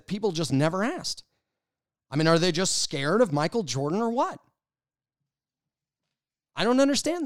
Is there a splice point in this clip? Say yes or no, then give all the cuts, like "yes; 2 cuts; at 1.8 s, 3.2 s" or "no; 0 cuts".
no; 0 cuts